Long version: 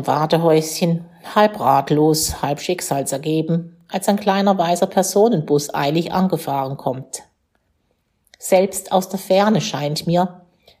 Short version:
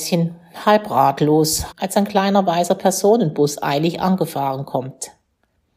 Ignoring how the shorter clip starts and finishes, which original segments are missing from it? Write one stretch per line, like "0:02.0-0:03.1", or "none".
0:02.4-0:03.8